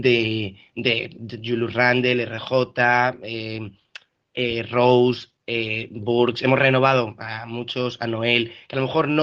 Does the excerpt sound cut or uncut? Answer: uncut